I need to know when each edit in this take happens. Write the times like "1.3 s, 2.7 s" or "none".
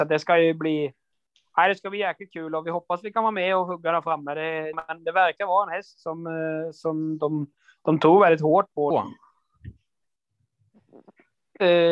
4.7 s, 8.9 s